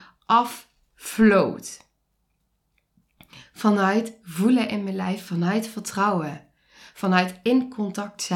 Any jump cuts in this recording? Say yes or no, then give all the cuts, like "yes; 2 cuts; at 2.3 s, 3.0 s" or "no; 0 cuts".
no; 0 cuts